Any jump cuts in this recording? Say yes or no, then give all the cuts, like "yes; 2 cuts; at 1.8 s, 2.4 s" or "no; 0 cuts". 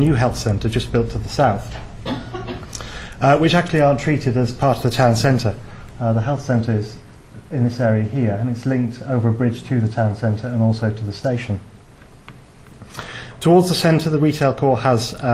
no; 0 cuts